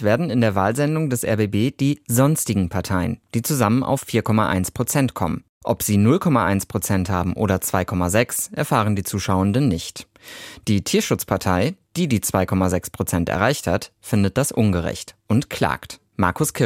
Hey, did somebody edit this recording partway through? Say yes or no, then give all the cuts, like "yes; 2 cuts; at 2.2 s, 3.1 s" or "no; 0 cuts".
no; 0 cuts